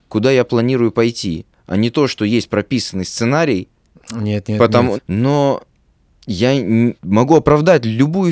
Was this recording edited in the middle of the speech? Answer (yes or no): yes